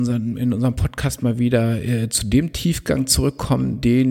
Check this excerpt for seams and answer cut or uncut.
uncut